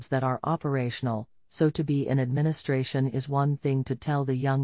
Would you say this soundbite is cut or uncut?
uncut